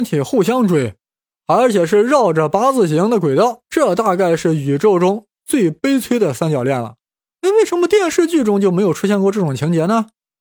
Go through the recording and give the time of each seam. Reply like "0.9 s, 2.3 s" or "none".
3.6 s, 7.3 s